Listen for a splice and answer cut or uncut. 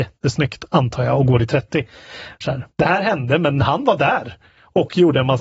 cut